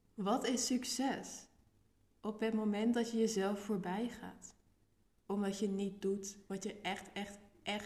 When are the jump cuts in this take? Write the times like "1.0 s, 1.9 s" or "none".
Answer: none